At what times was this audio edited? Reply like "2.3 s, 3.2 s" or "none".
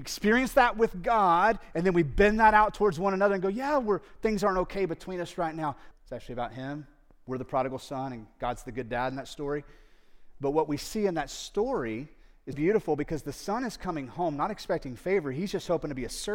5.9 s, 12.5 s